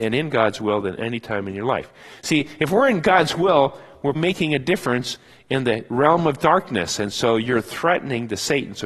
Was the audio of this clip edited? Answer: yes; 1 cut; at 4.1 s

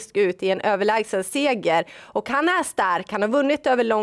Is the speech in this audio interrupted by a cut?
no; 0 cuts

